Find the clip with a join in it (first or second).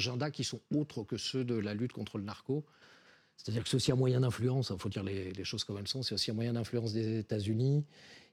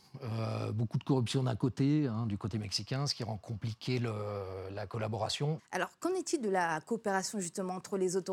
second